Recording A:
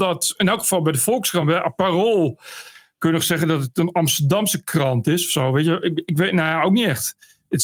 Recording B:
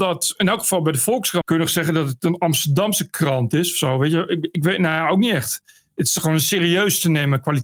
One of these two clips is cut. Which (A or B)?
B